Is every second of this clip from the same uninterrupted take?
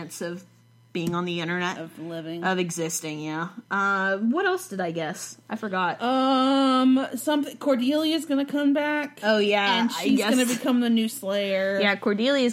yes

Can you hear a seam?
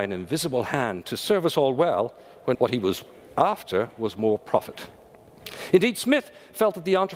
yes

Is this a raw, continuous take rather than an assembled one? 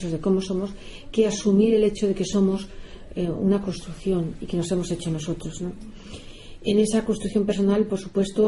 yes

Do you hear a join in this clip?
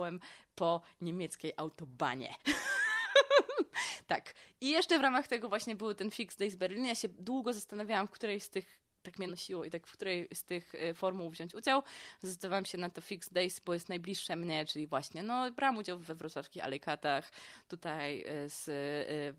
yes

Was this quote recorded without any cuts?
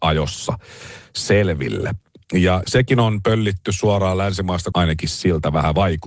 no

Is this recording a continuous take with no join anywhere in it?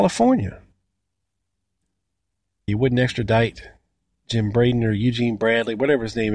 no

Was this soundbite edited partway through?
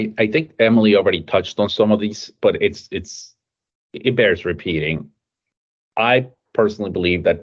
no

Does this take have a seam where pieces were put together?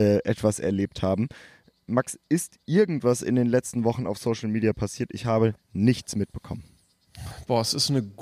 no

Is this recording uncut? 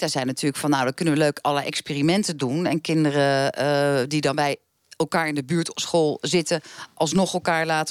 no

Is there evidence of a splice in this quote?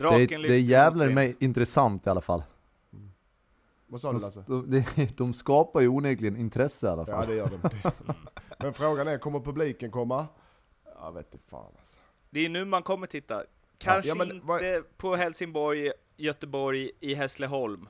yes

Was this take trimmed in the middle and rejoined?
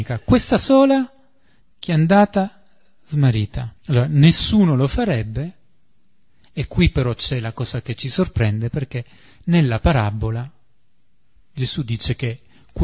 yes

